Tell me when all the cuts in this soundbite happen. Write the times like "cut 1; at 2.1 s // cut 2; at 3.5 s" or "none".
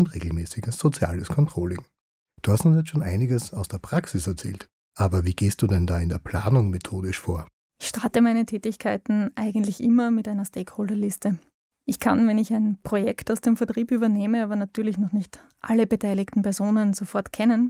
none